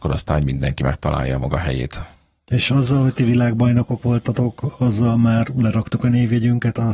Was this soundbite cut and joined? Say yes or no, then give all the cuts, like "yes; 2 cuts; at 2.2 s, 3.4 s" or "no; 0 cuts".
no; 0 cuts